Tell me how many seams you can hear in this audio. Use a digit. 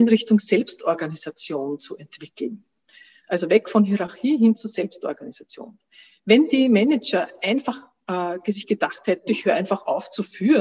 1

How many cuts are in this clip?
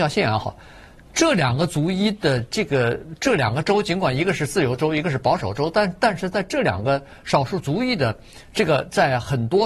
0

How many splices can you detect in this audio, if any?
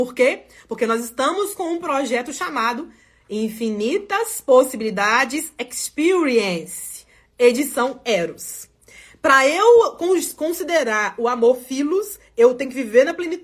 0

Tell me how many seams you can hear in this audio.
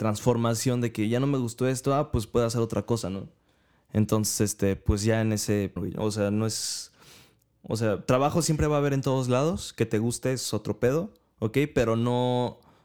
1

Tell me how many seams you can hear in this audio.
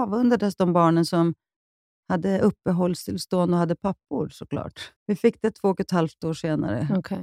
1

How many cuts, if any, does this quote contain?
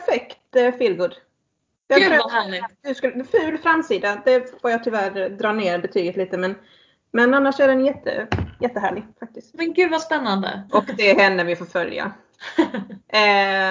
2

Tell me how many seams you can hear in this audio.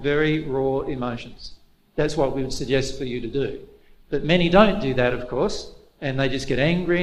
0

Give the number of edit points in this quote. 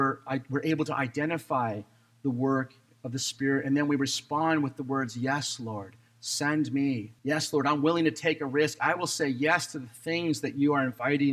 1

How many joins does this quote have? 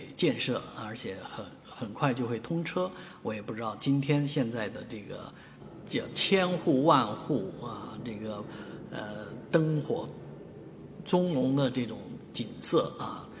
1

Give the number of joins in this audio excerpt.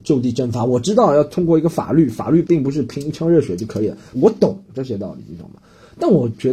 2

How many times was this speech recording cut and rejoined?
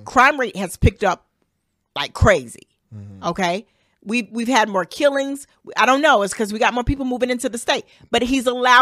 0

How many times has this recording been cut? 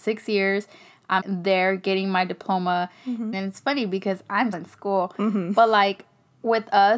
3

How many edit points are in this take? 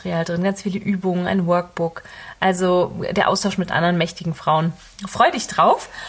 0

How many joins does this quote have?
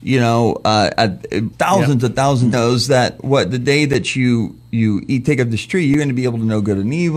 2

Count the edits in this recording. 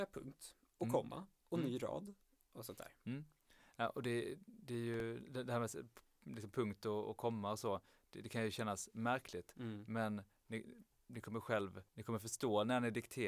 1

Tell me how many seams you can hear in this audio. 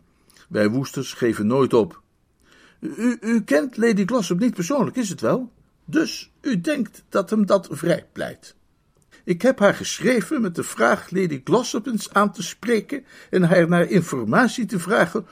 2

